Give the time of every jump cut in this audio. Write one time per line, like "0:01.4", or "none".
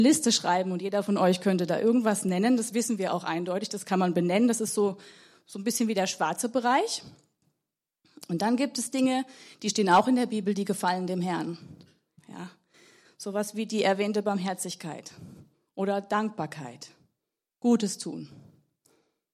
0:12.2

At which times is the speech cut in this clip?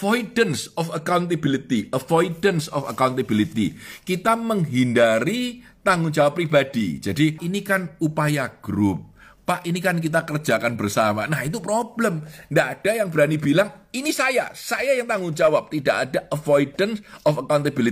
0:07.4

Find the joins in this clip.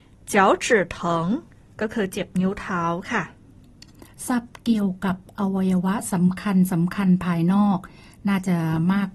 none

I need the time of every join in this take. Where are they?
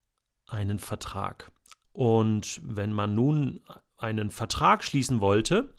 0:01.8

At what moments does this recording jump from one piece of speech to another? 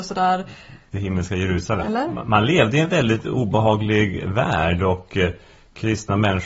0:01.8

